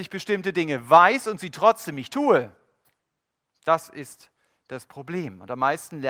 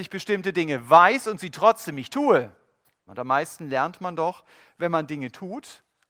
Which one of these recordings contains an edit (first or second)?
second